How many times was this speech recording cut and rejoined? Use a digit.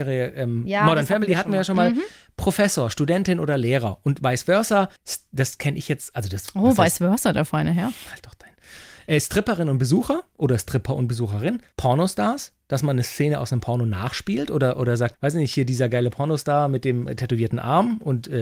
1